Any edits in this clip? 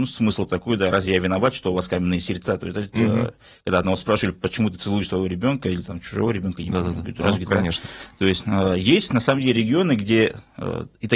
yes; 2 cuts; at 4.3 s, 7.5 s

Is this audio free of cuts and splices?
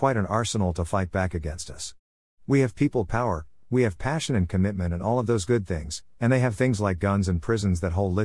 no; 1 cut; at 3.6 s

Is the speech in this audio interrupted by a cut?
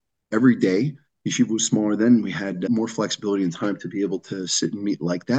no; 0 cuts

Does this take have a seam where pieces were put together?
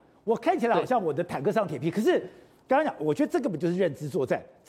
no; 0 cuts

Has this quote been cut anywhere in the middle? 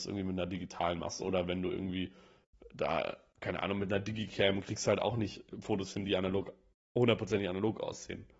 no; 0 cuts

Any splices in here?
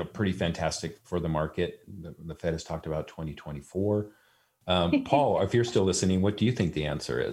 yes; 2 cuts; at 1.8 s, 4.6 s

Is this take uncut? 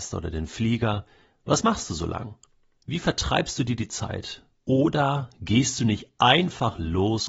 no; 1 cut; at 4.6 s

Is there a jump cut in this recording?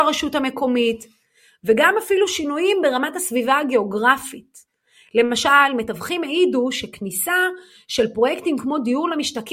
no; 0 cuts

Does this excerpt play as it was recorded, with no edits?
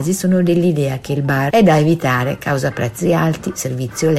no; 1 cut; at 1.5 s

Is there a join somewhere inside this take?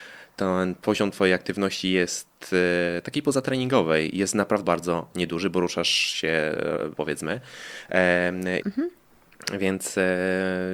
yes; 3 cuts; at 4.6 s, 6.9 s, 8.6 s

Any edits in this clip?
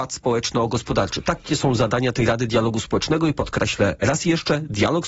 no; 0 cuts

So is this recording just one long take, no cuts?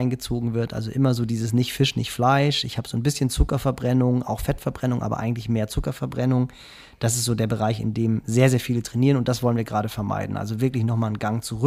yes; 0 cuts

